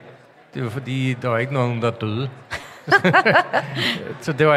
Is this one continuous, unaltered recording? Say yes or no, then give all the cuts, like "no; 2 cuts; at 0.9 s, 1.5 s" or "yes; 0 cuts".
yes; 0 cuts